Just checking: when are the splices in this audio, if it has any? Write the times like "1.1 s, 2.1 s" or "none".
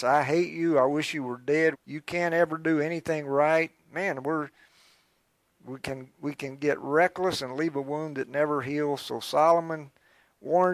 1.7 s